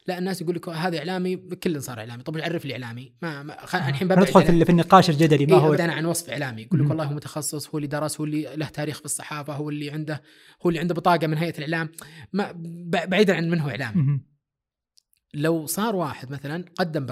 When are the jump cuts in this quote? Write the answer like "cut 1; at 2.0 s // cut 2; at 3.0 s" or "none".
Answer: cut 1; at 5.8 s